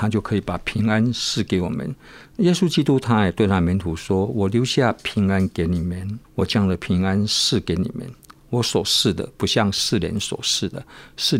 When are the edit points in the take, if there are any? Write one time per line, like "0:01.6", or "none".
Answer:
0:06.2